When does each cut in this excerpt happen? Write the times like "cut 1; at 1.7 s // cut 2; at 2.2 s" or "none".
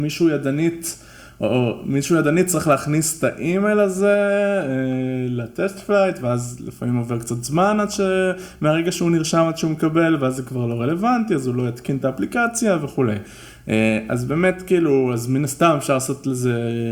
none